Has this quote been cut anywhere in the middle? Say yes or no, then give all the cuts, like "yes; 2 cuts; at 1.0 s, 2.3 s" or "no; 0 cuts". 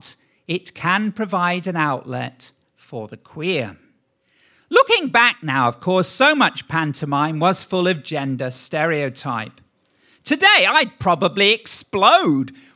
no; 0 cuts